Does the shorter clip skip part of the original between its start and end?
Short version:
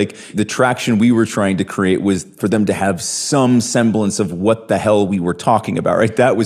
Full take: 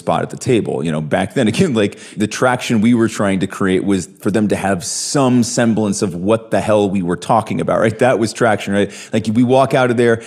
no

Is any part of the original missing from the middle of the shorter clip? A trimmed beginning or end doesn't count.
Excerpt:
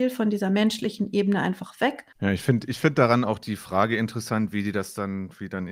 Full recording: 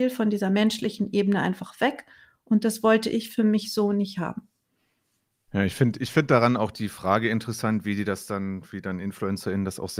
yes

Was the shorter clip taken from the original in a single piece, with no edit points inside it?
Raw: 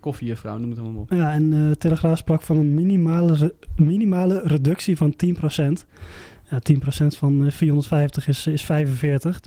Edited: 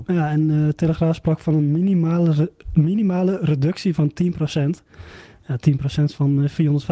yes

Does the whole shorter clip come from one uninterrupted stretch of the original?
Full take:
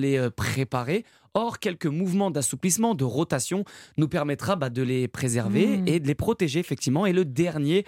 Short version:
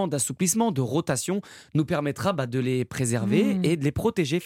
yes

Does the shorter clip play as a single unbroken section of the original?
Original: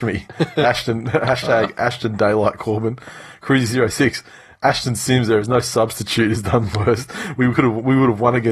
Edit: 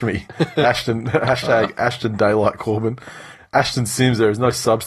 no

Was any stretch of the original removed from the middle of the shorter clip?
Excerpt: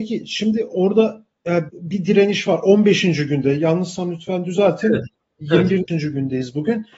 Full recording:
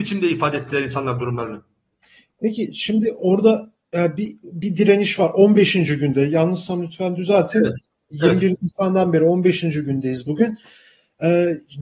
yes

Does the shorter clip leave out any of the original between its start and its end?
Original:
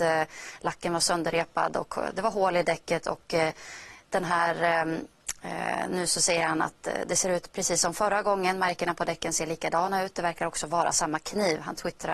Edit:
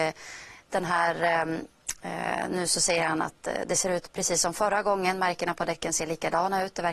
no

